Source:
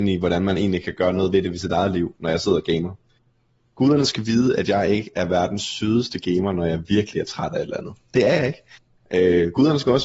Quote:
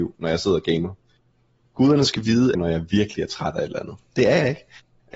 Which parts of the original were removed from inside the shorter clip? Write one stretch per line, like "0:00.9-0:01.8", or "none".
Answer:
0:04.6-0:06.5

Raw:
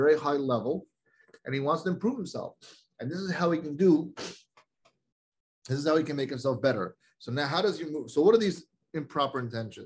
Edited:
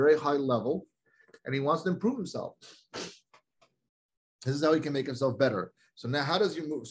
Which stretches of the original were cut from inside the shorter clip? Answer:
0:02.9-0:04.2

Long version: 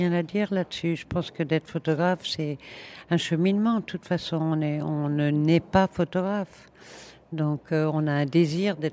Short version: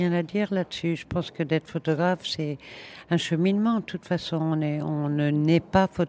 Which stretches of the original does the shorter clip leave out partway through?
none

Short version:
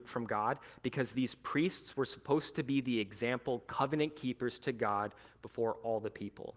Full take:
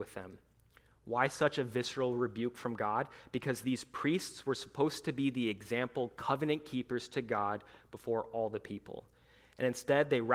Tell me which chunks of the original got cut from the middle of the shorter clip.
none

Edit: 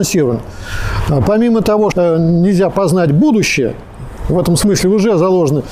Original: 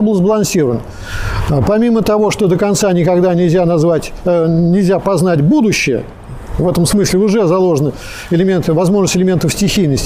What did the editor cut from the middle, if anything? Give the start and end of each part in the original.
0:02.3-0:04.2

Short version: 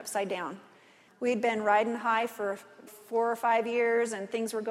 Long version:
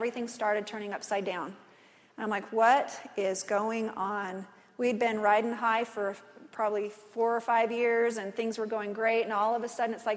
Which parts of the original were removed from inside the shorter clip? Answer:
0:02.0-0:04.6
0:06.4-0:06.9

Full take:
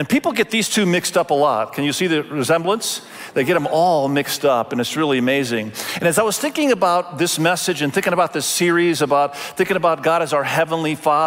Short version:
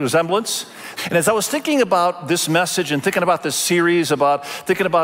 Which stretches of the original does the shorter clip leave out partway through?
0:03.3-0:05.9

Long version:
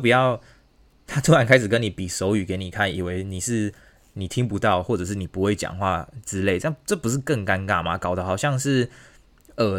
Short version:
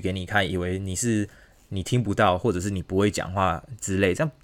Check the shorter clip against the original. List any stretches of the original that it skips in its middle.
none

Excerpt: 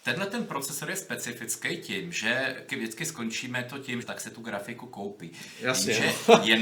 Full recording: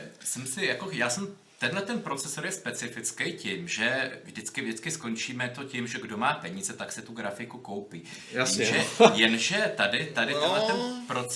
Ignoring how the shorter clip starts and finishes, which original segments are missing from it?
0:04.2-0:04.5
0:05.9-0:06.7

